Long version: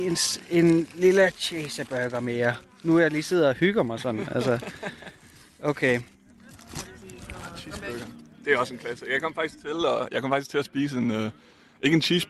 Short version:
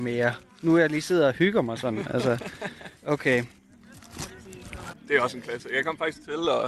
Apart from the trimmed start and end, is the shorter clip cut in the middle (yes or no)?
yes